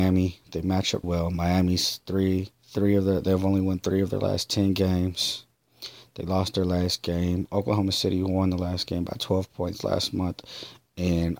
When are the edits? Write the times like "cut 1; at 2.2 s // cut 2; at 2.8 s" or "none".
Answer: cut 1; at 1.0 s // cut 2; at 2.5 s